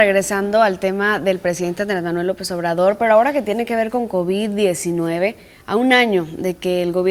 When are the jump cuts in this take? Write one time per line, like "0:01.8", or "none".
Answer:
none